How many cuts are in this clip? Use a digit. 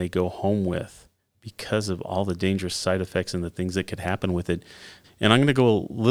1